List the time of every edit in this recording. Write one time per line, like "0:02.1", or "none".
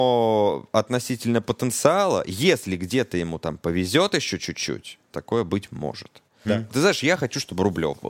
0:05.1
0:06.5